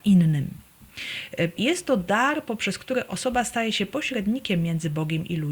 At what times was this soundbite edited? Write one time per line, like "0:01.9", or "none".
0:01.6